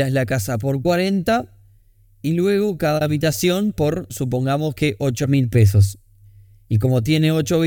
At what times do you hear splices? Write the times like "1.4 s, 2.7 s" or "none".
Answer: none